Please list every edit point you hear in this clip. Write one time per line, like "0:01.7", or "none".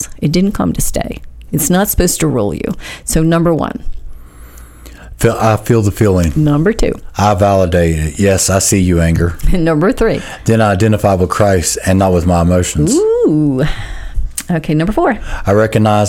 none